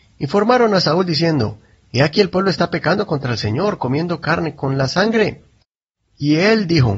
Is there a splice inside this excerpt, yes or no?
no